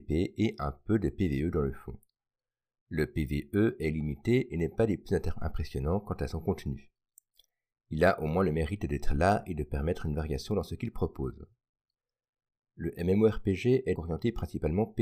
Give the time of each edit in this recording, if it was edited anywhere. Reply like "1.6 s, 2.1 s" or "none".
14.0 s